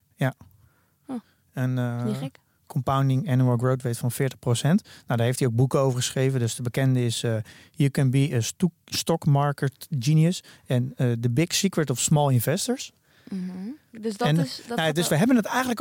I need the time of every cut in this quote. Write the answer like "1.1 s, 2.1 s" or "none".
none